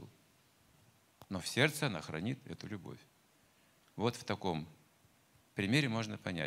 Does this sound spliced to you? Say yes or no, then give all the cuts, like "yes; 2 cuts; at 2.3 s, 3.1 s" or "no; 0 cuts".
no; 0 cuts